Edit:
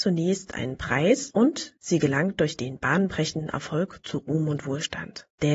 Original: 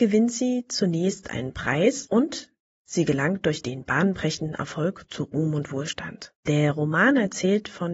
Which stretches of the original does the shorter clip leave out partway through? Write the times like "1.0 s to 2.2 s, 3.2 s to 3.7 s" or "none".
2.5 s to 2.8 s